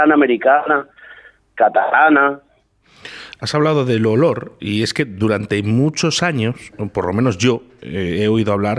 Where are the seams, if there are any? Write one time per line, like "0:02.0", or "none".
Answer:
none